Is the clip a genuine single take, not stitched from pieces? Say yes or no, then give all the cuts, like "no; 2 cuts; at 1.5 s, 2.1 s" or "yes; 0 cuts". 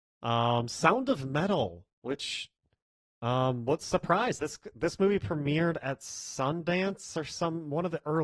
no; 1 cut; at 4.4 s